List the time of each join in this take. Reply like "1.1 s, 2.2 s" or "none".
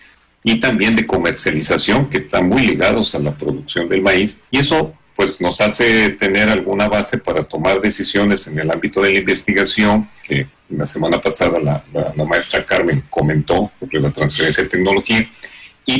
4.5 s, 10.2 s